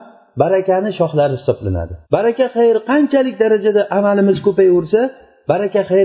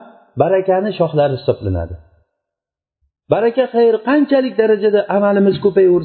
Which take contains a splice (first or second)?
first